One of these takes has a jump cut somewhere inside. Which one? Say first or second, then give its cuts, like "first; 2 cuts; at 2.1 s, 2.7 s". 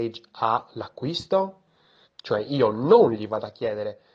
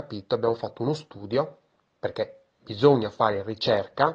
first; 1 cut; at 2.0 s